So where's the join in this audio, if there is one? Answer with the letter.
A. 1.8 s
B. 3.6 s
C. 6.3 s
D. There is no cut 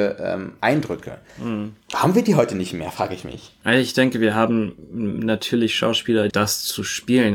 C